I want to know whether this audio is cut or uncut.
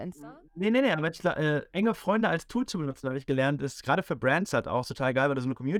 uncut